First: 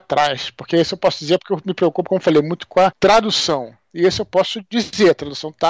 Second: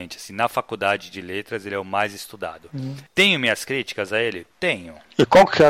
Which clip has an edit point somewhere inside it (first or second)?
second